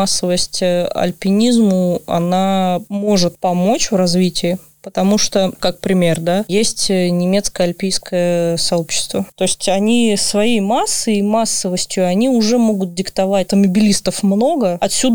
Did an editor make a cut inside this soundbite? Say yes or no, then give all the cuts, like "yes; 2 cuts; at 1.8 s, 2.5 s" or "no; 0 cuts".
yes; 3 cuts; at 5.6 s, 9.3 s, 13.5 s